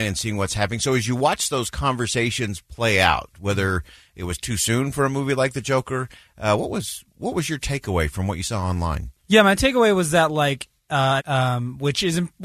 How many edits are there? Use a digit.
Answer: 2